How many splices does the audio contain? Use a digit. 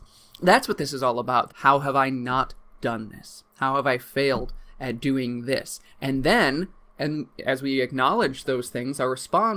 1